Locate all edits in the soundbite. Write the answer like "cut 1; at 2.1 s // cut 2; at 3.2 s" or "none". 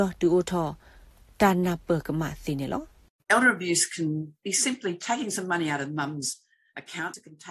none